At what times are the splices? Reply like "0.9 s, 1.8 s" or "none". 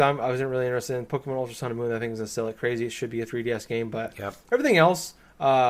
none